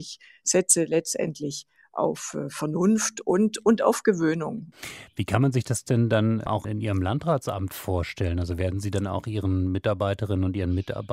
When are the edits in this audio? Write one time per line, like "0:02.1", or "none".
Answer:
none